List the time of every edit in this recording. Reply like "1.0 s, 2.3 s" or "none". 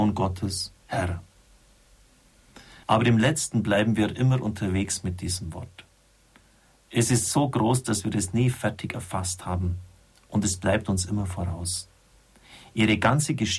2.8 s